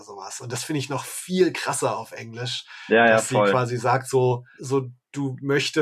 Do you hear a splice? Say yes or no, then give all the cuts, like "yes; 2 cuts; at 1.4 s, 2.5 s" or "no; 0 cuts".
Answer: yes; 1 cut; at 4.6 s